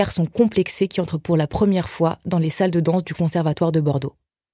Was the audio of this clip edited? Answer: no; 0 cuts

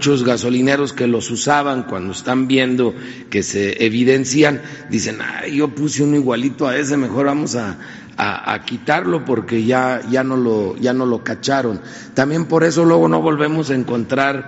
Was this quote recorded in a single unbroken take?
yes; 0 cuts

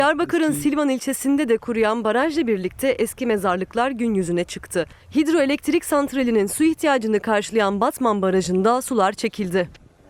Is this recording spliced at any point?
no; 0 cuts

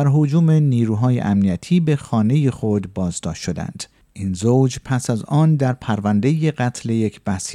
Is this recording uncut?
yes; 0 cuts

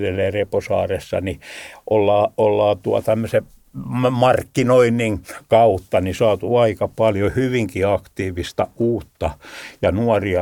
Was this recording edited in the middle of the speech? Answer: no; 0 cuts

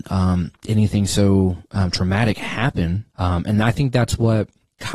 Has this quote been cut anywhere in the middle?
yes; 1 cut; at 3.1 s

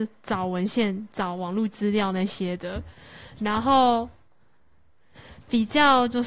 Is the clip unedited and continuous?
yes; 0 cuts

